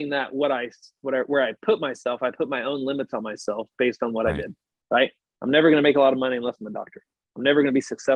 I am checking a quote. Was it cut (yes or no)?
no